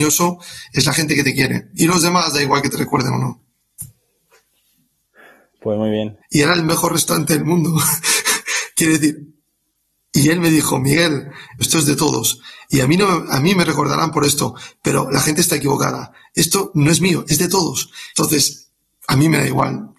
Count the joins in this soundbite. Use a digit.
3